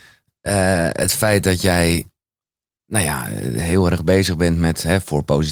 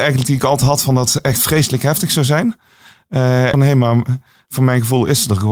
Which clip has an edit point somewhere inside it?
second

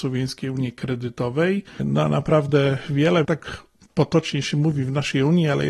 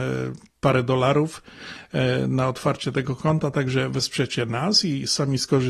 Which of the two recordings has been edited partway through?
first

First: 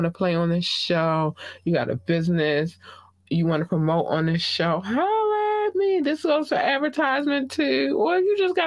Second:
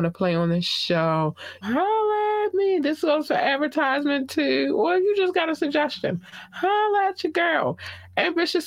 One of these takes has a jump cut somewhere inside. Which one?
second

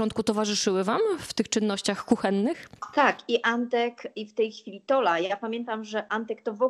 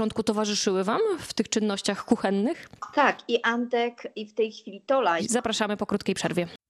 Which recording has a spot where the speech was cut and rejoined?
second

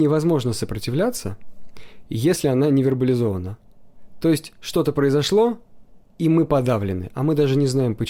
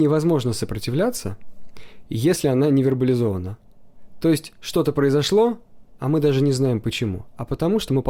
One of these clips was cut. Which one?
second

